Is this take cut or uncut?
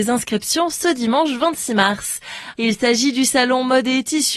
cut